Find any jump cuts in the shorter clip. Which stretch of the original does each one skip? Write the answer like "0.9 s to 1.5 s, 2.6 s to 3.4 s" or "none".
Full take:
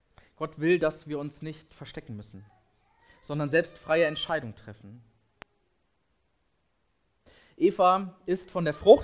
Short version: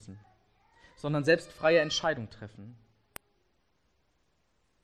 none